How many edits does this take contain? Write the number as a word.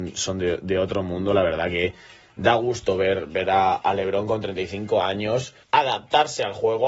one